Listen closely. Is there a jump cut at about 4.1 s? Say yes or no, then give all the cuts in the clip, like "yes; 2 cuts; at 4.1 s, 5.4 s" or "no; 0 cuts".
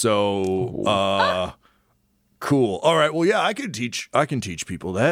no; 0 cuts